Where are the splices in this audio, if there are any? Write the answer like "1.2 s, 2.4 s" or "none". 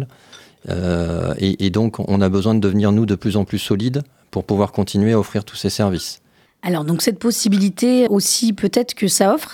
6.5 s, 8.1 s